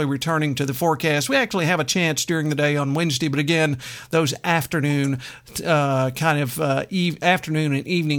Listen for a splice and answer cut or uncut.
uncut